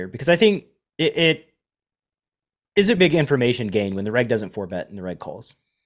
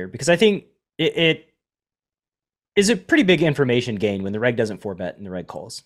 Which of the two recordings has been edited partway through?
first; 1 cut; at 3.0 s

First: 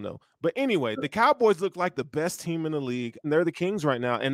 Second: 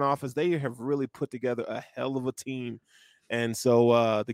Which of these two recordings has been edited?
first; 1 cut; at 3.2 s

